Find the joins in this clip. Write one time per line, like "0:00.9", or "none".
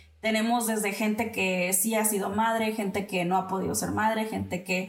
none